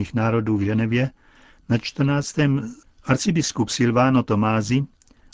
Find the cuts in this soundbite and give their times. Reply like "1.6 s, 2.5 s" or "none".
2.8 s